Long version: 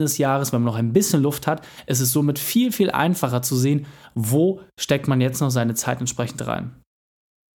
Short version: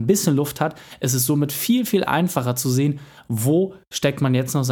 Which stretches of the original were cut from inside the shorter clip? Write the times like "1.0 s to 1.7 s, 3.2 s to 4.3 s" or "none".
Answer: none